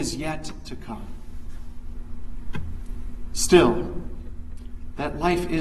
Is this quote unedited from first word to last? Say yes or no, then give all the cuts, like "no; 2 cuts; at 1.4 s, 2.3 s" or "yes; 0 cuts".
yes; 0 cuts